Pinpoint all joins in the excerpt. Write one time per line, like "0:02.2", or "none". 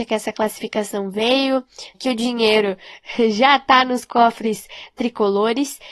0:01.9